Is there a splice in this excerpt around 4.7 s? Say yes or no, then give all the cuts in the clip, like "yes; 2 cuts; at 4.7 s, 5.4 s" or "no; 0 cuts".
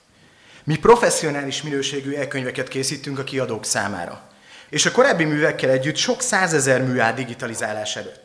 yes; 1 cut; at 4.7 s